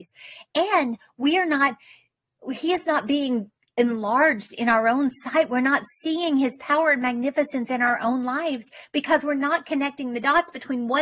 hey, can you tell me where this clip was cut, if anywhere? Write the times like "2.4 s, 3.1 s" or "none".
none

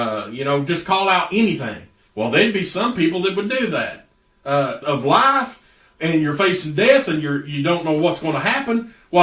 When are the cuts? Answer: 2.1 s, 4.8 s

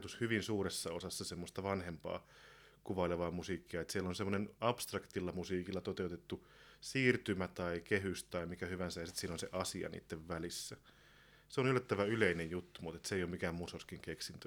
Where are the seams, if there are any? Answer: none

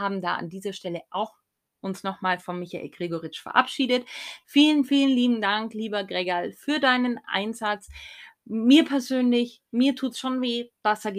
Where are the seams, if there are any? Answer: 4.4 s

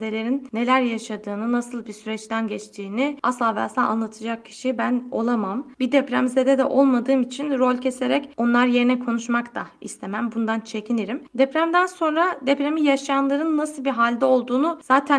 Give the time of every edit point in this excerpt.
11.3 s

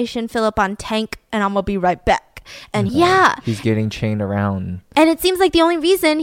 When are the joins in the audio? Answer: 2.9 s

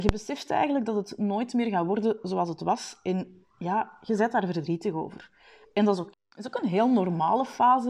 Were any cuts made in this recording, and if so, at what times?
6.1 s

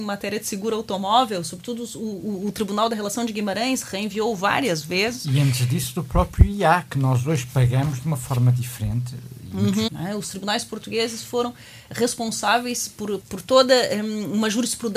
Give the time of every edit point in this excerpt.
9.9 s, 13.2 s

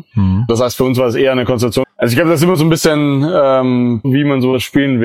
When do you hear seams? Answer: 1.8 s, 4.0 s

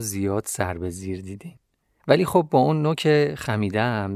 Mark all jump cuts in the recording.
2.0 s

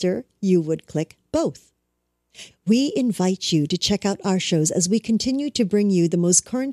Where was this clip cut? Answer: 2.5 s

